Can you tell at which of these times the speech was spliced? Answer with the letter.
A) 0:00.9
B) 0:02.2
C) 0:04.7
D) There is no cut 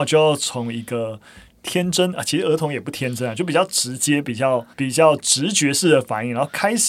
C